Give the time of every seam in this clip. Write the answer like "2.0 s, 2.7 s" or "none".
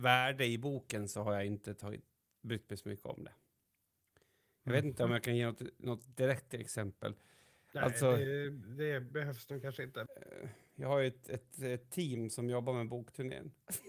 10.1 s